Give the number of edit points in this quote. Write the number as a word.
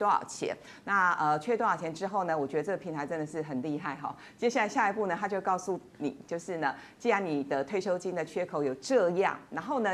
zero